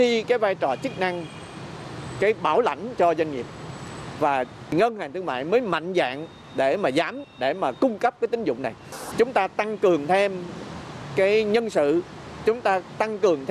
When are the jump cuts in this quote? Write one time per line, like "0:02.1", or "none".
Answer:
0:09.1